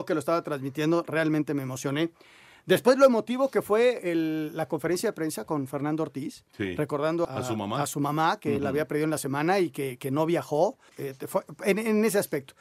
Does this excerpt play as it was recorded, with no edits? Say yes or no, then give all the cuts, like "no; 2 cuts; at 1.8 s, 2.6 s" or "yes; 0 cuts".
no; 2 cuts; at 7.2 s, 10.9 s